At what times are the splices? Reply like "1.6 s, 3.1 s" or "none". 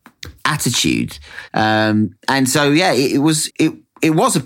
1.5 s, 3.5 s